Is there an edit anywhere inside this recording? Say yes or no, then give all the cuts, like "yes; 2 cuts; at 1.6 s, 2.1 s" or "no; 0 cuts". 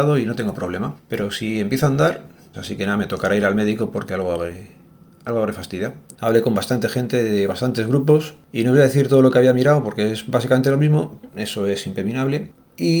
yes; 3 cuts; at 2.5 s, 6.1 s, 11.3 s